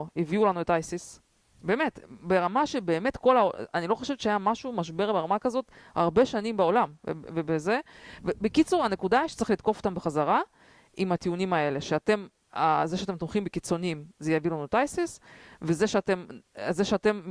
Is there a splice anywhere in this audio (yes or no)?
no